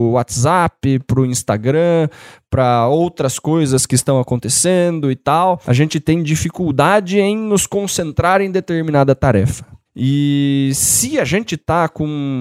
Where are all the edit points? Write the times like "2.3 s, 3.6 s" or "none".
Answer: none